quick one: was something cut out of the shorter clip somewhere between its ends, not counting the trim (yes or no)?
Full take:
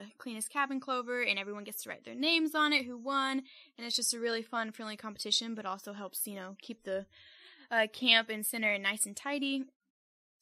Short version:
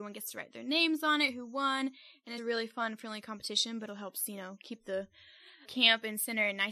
yes